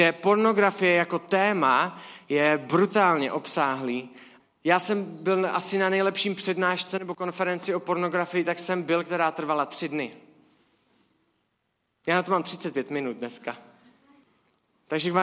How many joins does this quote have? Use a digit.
0